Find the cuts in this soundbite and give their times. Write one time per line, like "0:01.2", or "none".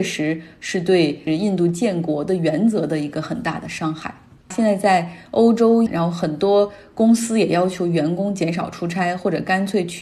0:04.5
0:05.9